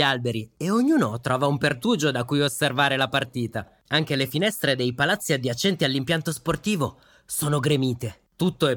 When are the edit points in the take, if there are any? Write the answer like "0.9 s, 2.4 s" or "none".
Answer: none